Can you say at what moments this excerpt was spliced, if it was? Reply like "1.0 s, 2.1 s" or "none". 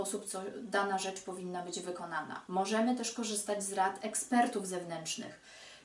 none